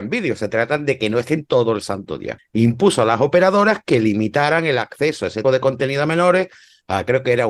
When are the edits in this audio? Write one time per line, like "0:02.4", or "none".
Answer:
0:02.4
0:05.4